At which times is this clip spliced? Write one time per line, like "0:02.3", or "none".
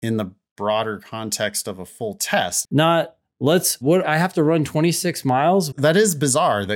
0:02.6
0:03.8
0:05.7